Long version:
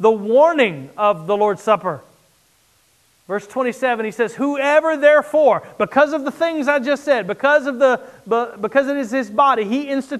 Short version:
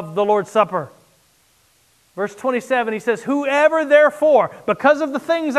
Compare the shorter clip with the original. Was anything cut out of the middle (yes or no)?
no